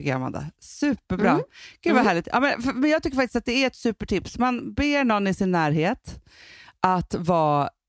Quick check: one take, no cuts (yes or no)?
yes